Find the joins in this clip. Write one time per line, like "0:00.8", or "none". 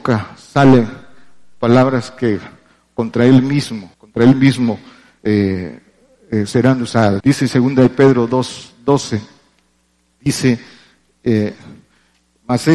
0:03.9
0:07.2